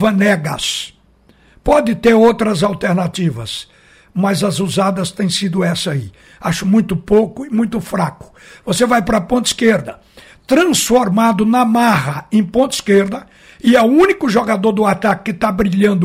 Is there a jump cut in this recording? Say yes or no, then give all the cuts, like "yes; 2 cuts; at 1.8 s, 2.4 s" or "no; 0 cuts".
no; 0 cuts